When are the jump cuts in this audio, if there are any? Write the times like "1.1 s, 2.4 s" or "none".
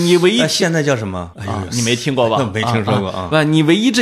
1.3 s